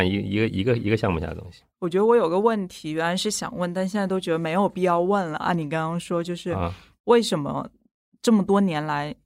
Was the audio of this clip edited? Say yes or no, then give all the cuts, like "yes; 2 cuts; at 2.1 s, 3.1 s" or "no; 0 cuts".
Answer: no; 0 cuts